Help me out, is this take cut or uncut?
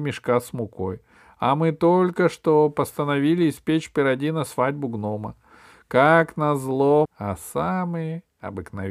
cut